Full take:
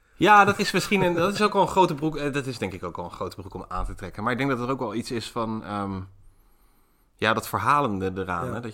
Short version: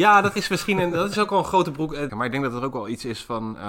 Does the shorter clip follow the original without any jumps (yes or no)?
no